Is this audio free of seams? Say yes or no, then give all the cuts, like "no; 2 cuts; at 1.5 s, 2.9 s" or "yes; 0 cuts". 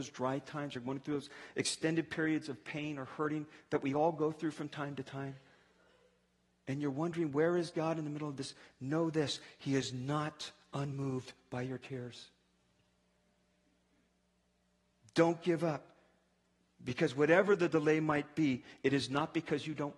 yes; 0 cuts